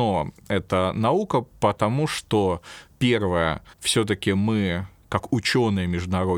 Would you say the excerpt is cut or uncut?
cut